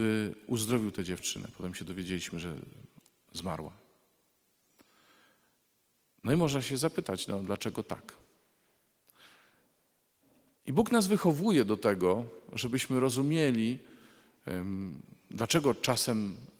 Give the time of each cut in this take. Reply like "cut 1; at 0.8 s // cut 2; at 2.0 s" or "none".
none

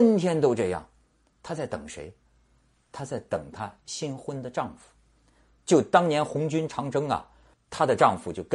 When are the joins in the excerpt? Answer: cut 1; at 7.5 s

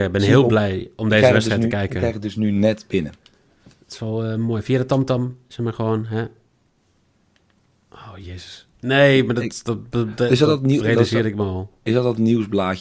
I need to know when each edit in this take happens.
cut 1; at 8.7 s

